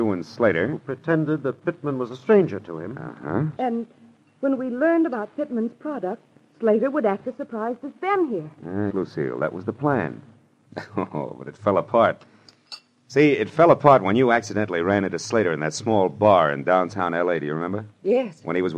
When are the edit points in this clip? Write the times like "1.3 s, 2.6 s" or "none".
3.6 s, 8.9 s